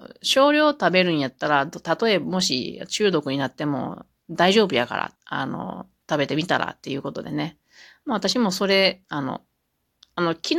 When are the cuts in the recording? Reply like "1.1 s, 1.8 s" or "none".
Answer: 5.2 s, 9.0 s